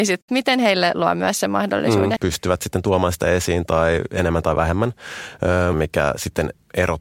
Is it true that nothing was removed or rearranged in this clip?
no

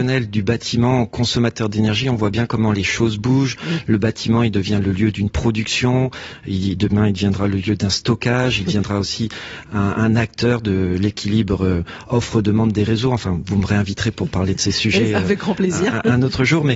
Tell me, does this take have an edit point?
no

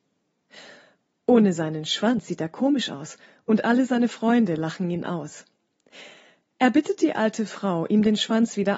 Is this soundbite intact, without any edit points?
yes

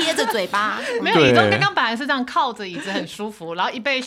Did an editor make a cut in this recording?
no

